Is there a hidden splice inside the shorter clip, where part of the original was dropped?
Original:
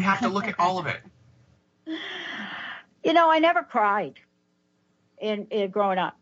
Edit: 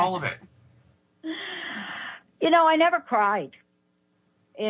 no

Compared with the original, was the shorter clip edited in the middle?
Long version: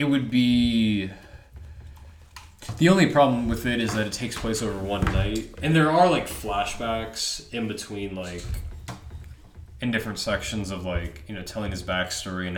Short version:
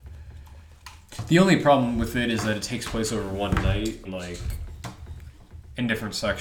yes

